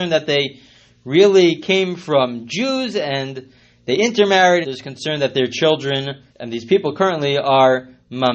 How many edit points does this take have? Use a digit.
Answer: 2